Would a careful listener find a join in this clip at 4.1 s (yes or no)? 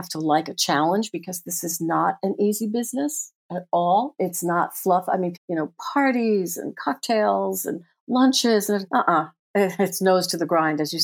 no